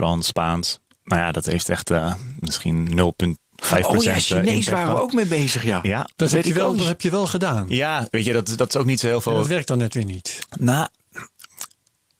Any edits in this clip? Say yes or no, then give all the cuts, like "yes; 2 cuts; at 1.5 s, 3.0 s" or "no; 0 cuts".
no; 0 cuts